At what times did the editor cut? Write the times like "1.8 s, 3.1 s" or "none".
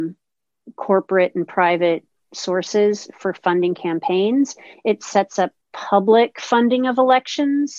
none